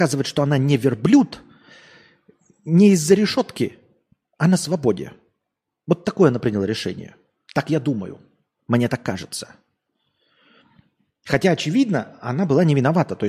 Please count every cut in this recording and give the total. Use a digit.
0